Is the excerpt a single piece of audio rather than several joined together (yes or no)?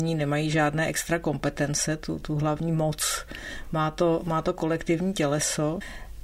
yes